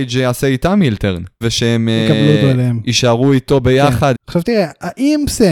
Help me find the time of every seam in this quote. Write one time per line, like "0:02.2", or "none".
0:01.4
0:04.1